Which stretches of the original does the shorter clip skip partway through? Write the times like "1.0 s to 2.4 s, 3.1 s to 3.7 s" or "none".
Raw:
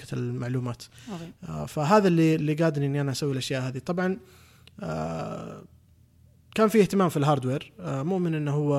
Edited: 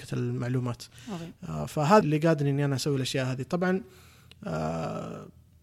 2.0 s to 2.4 s